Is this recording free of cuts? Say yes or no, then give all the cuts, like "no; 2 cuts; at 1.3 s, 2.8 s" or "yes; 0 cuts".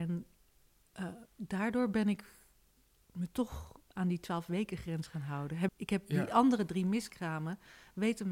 no; 1 cut; at 5.7 s